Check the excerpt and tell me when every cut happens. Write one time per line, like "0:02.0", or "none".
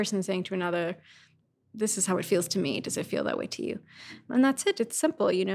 none